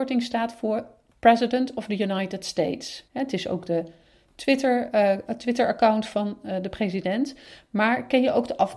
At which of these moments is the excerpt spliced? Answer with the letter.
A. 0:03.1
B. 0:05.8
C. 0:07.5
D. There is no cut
A